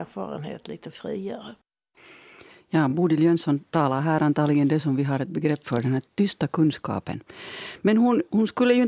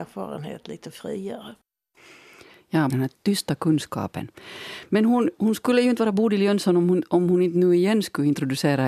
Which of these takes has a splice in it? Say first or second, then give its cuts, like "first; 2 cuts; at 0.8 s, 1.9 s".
second; 1 cut; at 2.9 s